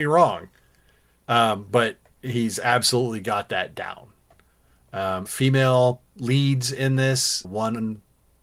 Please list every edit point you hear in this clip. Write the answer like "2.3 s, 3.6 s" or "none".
5.3 s, 7.4 s

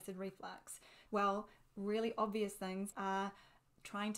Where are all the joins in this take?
1.1 s, 2.9 s

